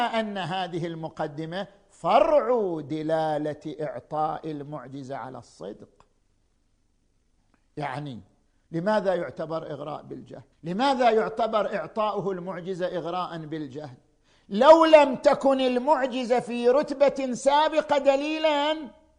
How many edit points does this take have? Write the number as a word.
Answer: one